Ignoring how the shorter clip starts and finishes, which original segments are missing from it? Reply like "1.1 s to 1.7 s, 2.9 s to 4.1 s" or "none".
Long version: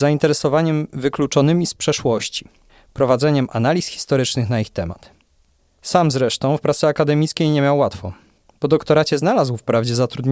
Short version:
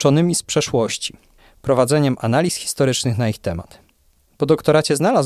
5.6 s to 8.5 s